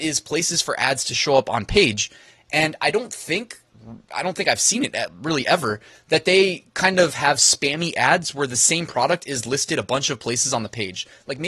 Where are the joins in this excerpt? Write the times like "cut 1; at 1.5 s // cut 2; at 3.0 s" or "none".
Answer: none